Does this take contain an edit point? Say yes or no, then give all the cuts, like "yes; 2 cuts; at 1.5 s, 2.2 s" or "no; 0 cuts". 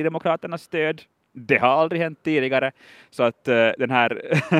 no; 0 cuts